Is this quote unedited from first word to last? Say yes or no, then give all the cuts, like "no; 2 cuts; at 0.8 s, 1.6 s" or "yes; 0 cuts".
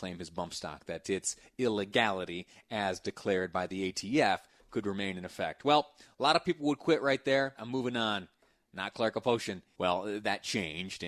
no; 2 cuts; at 7.5 s, 9.7 s